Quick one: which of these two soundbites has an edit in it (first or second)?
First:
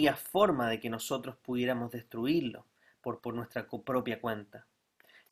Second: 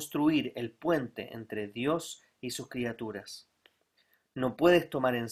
first